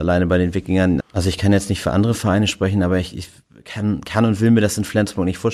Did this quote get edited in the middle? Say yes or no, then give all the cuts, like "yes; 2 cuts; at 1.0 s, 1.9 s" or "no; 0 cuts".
yes; 1 cut; at 1.0 s